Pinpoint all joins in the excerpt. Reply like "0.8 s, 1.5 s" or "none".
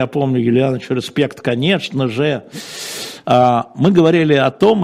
3.2 s